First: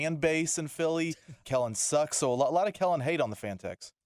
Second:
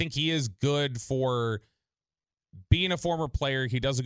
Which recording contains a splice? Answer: first; 1 cut; at 1.4 s

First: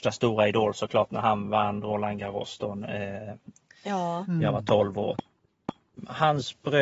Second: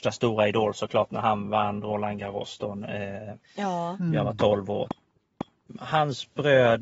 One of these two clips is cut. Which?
second; 1 cut; at 3.4 s

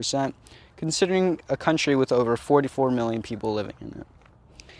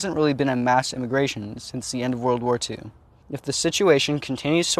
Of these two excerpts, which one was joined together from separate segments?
second; 1 cut; at 3.2 s

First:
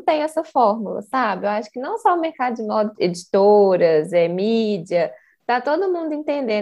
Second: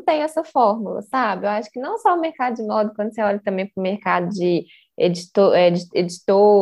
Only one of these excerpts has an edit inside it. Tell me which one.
first; 1 cut; at 2.9 s

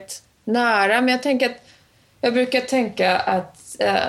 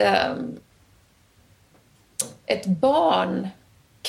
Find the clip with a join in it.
second; 1 cut; at 2.4 s

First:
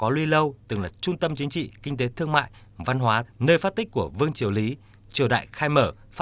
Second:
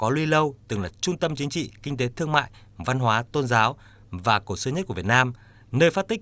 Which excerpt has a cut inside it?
first; 1 cut; at 3.2 s

